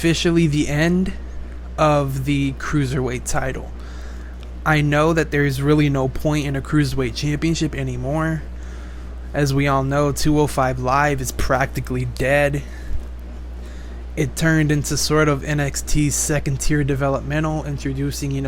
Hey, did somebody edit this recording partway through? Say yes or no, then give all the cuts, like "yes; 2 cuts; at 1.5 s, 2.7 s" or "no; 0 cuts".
no; 0 cuts